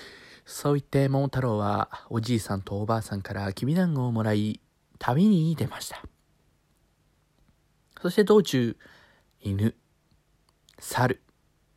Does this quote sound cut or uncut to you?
uncut